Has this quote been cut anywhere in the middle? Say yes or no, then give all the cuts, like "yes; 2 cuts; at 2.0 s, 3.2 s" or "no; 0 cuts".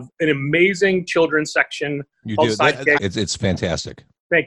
yes; 1 cut; at 3.0 s